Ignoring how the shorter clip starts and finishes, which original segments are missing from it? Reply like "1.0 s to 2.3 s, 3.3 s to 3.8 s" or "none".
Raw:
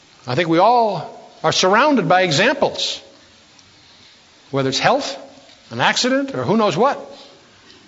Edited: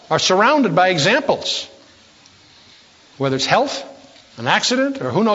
none